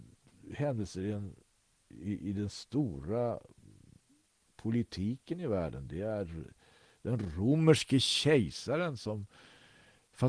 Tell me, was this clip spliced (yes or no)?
no